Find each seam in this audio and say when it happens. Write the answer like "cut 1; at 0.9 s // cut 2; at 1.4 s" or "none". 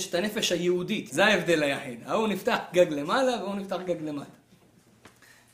cut 1; at 1.1 s